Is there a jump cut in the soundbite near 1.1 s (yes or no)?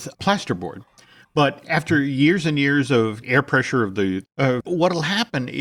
no